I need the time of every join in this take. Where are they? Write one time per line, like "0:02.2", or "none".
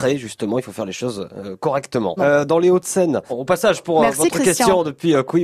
0:02.2
0:03.3